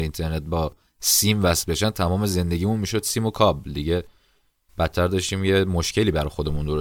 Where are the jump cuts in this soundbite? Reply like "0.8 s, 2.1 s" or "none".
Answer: none